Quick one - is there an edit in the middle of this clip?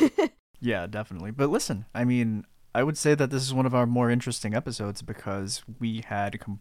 no; 0 cuts

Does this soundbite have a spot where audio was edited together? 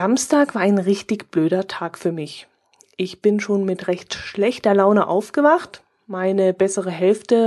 no; 0 cuts

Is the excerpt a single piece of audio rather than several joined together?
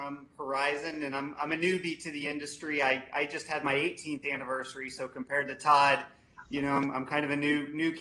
yes; 0 cuts

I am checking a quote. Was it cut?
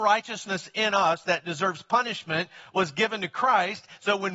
no; 0 cuts

